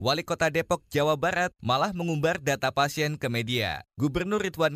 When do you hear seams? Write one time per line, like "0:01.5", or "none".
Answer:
0:01.6